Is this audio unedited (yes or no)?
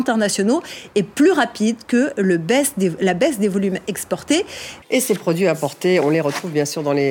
no